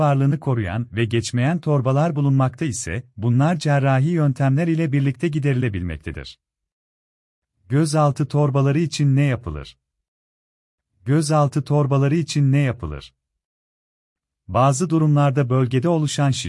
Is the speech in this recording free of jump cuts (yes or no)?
yes